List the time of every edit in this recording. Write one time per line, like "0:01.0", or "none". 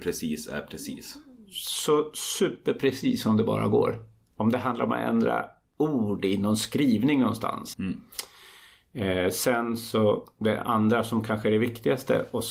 0:07.7